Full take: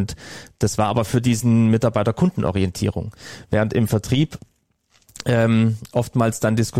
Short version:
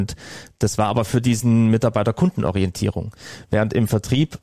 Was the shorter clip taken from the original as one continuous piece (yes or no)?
yes